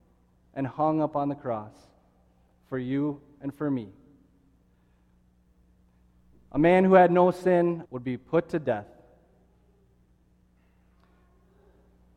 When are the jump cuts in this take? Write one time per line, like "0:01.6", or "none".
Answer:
0:07.8